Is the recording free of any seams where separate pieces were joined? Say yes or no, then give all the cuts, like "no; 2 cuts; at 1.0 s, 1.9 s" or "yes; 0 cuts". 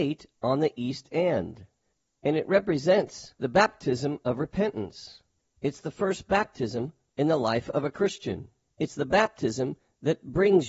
no; 1 cut; at 5.5 s